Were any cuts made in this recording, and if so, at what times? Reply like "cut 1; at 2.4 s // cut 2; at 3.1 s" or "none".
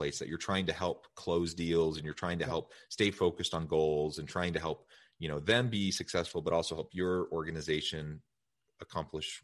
none